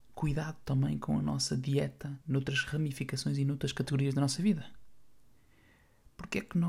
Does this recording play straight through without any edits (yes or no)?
no